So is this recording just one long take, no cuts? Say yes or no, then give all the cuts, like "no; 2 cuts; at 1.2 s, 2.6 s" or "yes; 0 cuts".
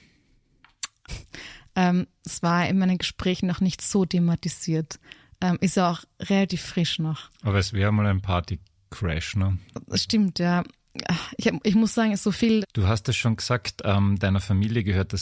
no; 2 cuts; at 1.1 s, 12.6 s